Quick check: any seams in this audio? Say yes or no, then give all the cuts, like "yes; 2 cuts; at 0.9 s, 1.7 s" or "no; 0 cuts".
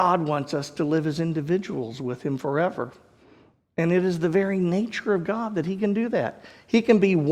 no; 0 cuts